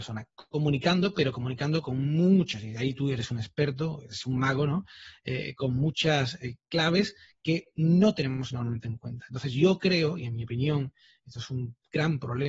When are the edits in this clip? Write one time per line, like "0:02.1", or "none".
none

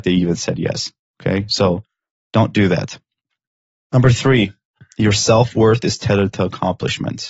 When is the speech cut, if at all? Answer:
none

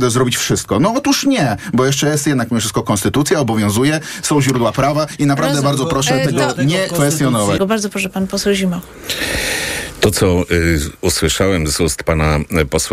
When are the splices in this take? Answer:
0:07.6

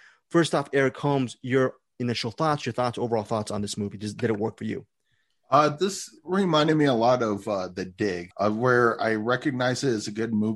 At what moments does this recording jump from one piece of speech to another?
none

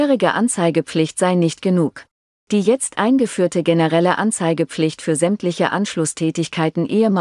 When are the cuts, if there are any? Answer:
0:02.3

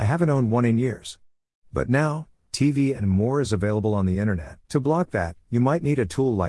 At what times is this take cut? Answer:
0:04.6

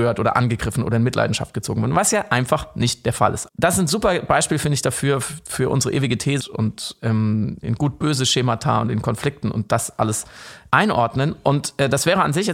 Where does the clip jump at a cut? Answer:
0:03.5
0:06.4
0:07.6

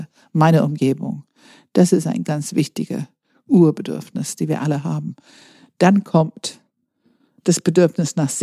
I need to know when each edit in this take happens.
0:02.2

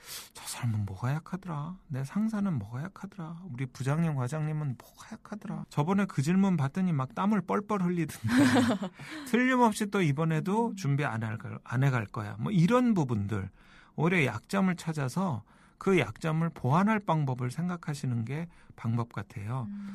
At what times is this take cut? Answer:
0:05.6

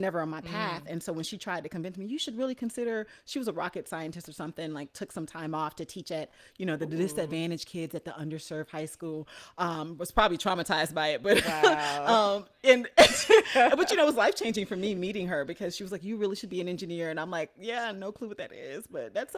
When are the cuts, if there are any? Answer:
none

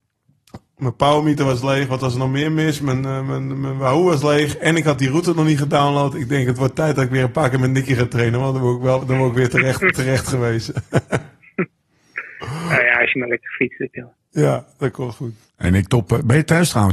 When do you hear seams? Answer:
none

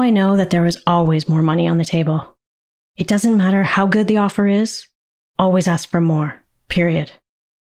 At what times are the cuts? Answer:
none

